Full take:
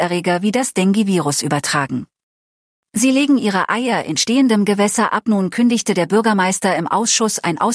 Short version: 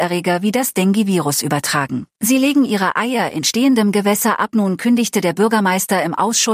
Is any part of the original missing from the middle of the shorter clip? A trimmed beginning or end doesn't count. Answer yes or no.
yes